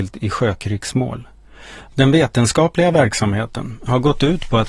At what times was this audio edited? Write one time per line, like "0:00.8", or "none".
0:01.9